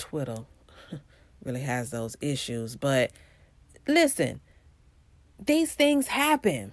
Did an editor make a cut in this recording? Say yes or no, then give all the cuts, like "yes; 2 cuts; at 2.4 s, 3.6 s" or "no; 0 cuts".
no; 0 cuts